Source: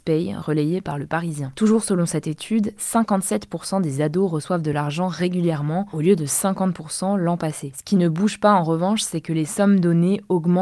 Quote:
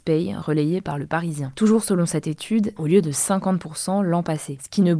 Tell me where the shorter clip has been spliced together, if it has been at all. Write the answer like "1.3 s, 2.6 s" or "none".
2.8 s